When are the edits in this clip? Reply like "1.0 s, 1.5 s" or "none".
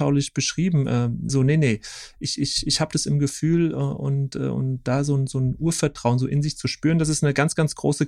1.3 s